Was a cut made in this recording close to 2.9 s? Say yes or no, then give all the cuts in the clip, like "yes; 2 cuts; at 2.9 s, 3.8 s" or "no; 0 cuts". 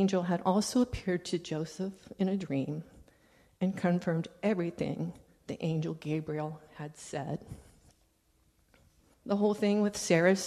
no; 1 cut; at 9.1 s